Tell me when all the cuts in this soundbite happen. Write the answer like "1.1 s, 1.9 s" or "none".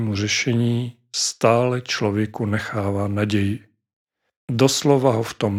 none